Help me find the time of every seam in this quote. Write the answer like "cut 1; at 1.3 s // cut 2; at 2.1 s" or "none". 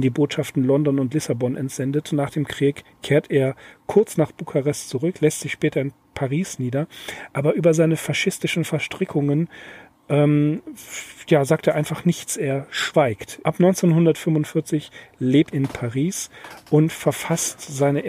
cut 1; at 13.4 s // cut 2; at 15.5 s